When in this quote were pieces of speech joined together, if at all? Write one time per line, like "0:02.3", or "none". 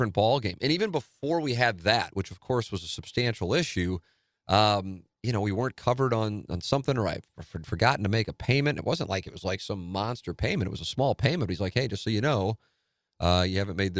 none